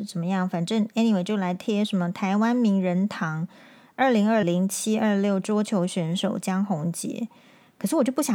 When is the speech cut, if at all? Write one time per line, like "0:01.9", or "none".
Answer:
0:04.4